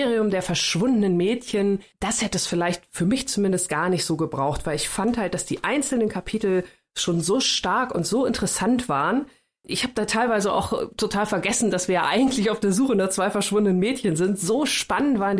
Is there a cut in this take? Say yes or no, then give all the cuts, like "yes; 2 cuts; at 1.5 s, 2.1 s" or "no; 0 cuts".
no; 0 cuts